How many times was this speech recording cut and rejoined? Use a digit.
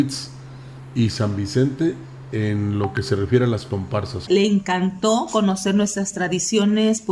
1